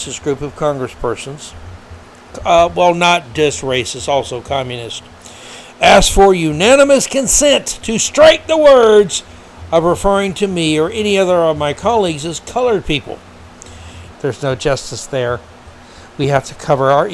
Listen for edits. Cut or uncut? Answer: cut